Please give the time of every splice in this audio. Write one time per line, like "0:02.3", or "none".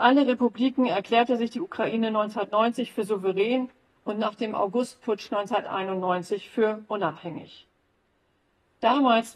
none